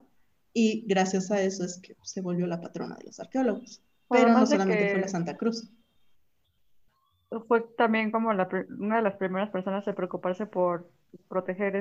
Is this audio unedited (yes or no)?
no